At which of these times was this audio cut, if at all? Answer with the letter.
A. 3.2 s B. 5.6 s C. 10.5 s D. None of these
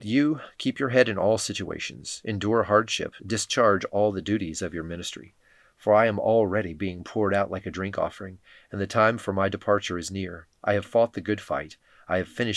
A